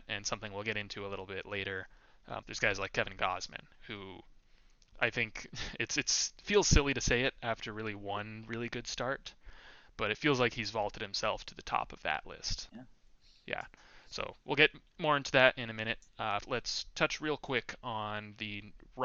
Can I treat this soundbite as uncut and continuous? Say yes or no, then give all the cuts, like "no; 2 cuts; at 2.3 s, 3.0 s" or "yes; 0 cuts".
no; 3 cuts; at 2.4 s, 12.7 s, 16.4 s